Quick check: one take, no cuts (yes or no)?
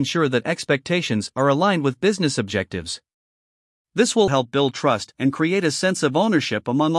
no